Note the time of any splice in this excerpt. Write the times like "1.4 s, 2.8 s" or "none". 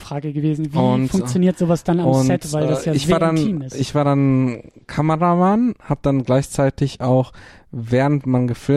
none